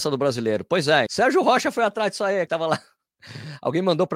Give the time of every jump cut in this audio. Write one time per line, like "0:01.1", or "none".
0:01.1
0:02.5